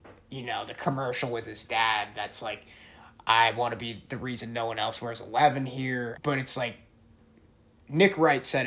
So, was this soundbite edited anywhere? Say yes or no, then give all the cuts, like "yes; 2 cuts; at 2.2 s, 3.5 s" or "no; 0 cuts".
yes; 1 cut; at 6.1 s